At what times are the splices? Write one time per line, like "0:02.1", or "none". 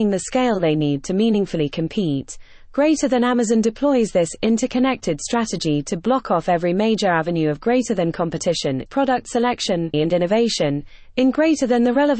0:08.9
0:09.9